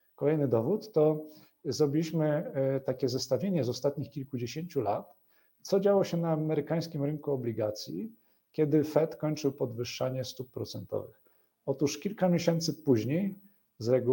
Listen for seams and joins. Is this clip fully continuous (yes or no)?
yes